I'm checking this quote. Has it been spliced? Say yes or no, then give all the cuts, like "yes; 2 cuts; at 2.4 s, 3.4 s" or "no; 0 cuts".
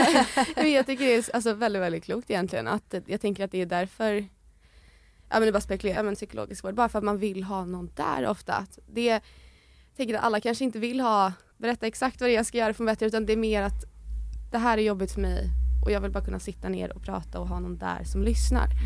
yes; 2 cuts; at 6.0 s, 11.5 s